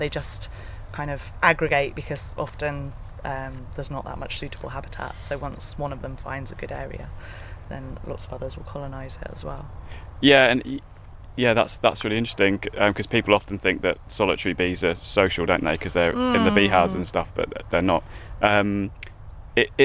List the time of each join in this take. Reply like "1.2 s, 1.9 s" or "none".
none